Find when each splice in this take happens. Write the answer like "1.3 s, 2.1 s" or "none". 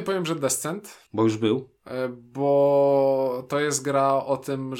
1.1 s